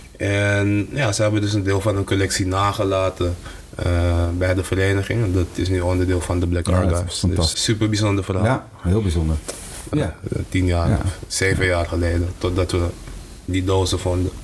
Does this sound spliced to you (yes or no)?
yes